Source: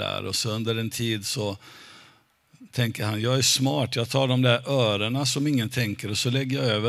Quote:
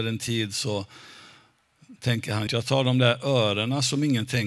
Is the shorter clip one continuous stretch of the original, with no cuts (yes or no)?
no